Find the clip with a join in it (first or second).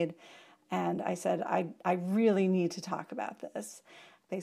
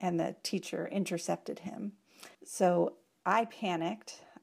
second